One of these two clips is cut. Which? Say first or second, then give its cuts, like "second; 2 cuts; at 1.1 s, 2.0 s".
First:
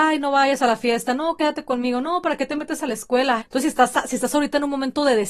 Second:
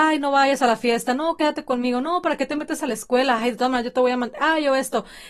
first; 1 cut; at 3.4 s